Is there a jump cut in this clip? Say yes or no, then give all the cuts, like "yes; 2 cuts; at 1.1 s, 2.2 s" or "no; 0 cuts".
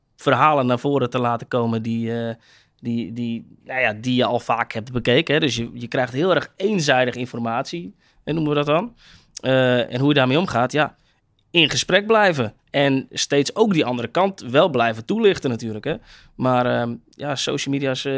no; 0 cuts